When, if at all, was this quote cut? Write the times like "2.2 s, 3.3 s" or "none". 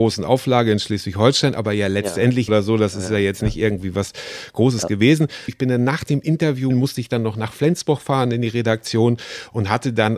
2.5 s, 5.5 s, 6.7 s